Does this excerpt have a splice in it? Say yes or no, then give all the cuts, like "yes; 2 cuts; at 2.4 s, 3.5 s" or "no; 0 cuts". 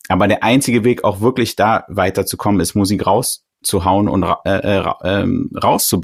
no; 0 cuts